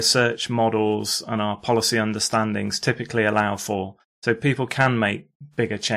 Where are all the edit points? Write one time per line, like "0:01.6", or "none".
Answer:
none